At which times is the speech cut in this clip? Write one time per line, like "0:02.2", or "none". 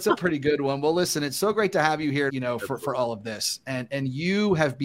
0:02.3

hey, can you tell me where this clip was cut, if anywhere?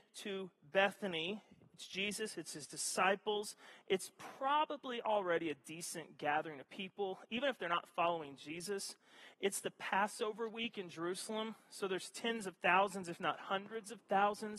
none

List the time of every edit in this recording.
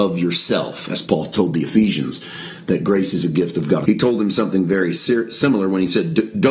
0:03.9

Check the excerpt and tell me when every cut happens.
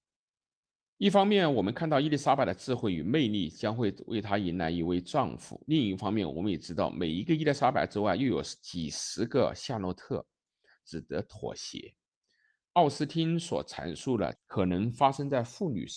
0:10.8
0:14.3

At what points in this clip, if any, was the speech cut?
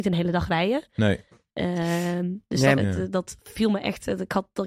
0:02.8

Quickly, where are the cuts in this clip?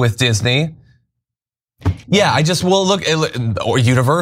0:02.0

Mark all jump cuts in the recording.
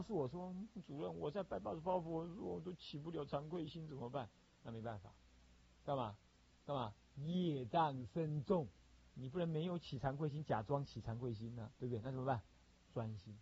0:09.1
0:11.8

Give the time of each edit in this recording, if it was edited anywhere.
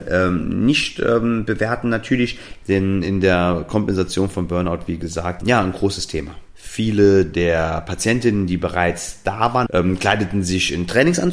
0:02.6
0:05.4
0:09.7

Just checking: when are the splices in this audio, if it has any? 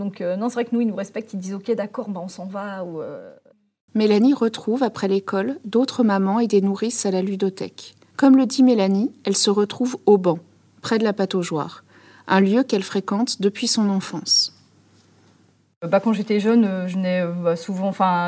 0:03.9
0:08.1

